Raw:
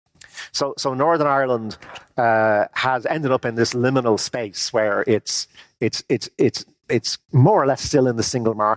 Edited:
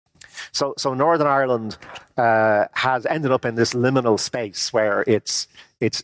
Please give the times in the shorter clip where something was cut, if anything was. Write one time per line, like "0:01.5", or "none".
none